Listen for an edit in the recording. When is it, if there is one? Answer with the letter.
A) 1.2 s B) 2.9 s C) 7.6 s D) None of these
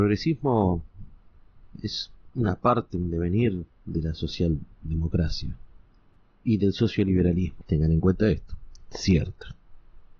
C